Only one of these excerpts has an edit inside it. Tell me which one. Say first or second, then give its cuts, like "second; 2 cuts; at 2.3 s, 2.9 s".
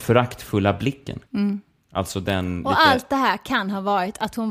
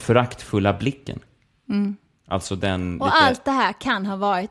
first; 1 cut; at 1.2 s